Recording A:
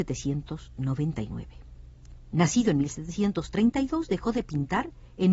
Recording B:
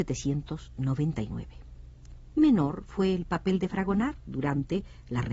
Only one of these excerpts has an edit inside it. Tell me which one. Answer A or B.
A